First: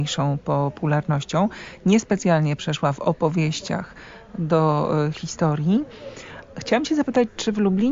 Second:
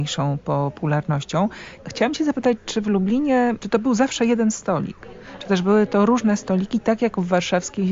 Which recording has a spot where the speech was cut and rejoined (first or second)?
second